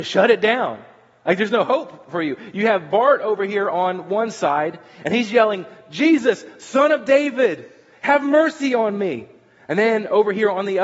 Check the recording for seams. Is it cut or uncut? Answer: uncut